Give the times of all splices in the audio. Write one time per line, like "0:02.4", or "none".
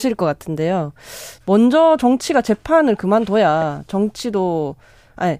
0:01.4